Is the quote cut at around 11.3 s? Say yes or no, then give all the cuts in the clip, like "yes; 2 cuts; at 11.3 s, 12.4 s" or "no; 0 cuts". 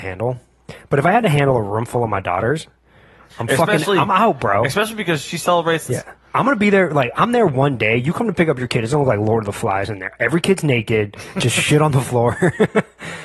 no; 2 cuts; at 3.3 s, 5.9 s